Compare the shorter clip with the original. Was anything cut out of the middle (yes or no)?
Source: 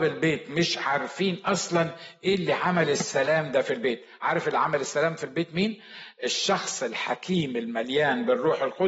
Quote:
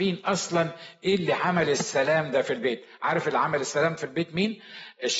no